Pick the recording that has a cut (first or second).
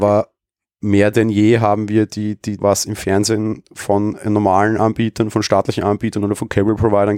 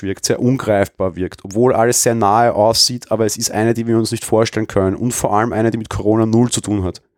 first